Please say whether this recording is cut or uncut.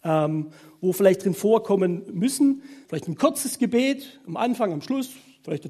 cut